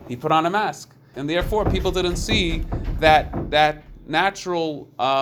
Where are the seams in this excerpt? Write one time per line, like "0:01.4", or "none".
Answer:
0:01.1